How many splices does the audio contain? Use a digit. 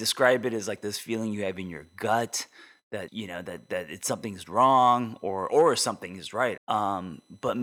2